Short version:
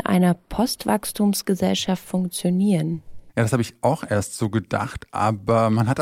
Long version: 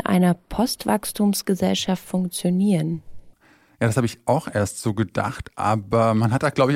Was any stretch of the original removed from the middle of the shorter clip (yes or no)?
yes